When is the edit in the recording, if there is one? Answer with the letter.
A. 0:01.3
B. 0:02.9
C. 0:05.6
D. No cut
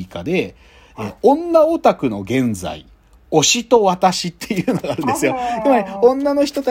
D